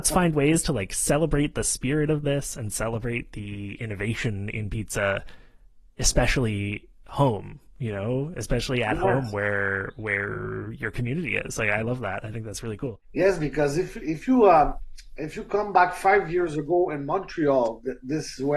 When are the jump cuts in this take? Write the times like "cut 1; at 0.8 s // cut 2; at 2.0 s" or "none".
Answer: none